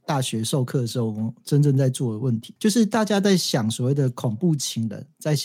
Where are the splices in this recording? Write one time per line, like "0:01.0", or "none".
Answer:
0:02.6